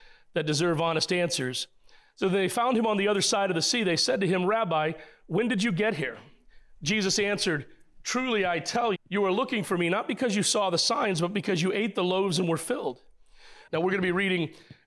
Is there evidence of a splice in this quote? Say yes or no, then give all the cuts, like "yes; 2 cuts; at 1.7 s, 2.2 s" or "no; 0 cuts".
yes; 2 cuts; at 8.9 s, 13.7 s